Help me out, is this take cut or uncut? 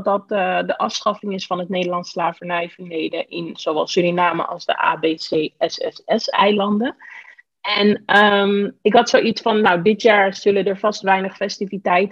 uncut